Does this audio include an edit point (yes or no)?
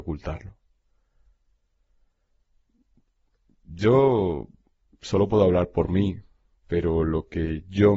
no